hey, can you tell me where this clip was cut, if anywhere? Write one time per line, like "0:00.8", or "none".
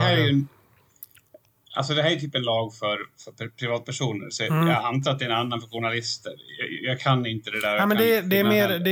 none